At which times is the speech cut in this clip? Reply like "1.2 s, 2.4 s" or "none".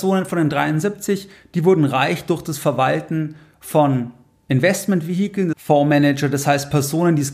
5.5 s